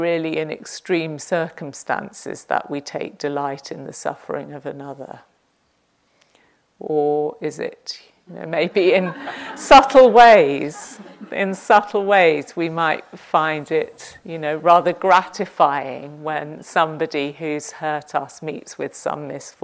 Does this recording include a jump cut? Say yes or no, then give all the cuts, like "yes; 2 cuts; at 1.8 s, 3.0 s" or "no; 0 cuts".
no; 0 cuts